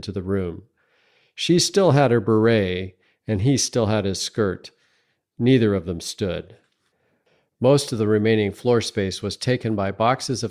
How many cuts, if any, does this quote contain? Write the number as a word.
zero